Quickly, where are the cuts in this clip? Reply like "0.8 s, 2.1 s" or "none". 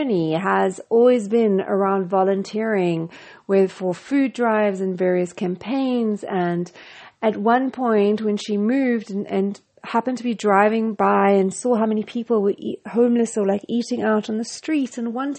none